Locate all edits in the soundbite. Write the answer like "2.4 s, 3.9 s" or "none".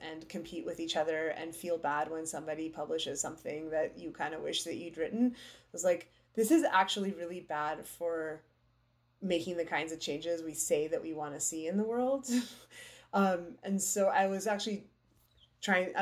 none

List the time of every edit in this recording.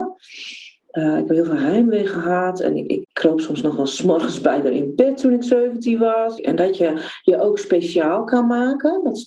3.0 s, 6.4 s

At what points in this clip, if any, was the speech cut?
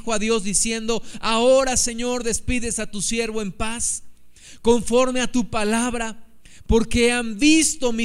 none

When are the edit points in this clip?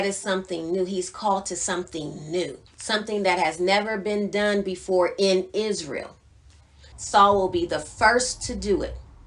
2.7 s, 6.9 s

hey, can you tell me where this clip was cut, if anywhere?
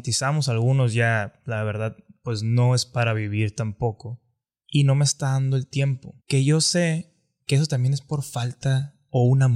4.6 s, 6.2 s

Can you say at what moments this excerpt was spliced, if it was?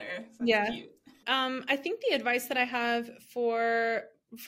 1.2 s

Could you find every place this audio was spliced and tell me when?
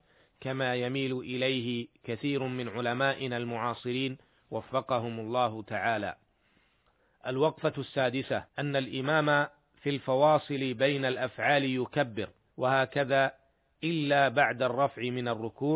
8.5 s, 12.5 s

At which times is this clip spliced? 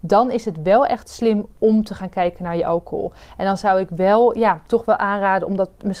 none

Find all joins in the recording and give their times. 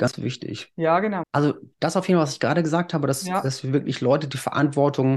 1.2 s

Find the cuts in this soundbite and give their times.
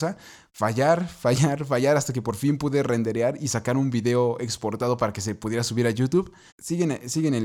6.5 s

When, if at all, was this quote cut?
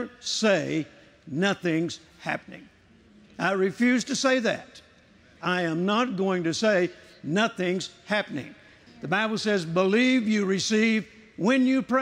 5.4 s, 8.9 s

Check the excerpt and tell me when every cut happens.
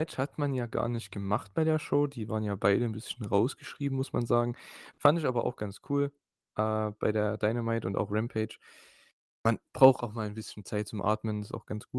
none

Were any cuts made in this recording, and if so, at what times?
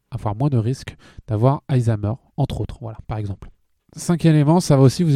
none

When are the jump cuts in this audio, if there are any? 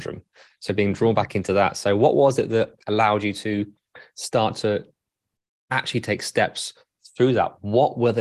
none

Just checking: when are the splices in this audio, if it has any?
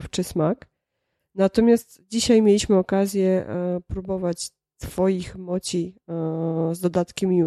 1.2 s

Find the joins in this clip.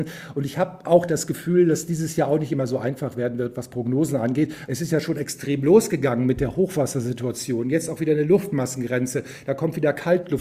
4.7 s

